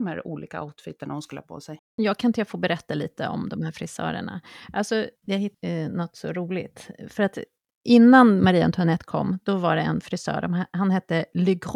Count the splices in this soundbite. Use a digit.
1